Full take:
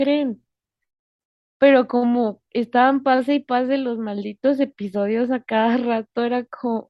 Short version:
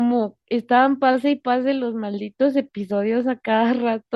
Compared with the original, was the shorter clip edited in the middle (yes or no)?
no